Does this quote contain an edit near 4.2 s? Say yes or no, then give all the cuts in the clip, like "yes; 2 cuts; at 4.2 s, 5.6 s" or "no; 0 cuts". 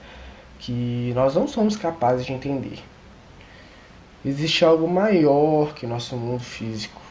no; 0 cuts